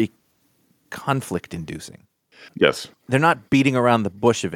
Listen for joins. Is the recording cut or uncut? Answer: cut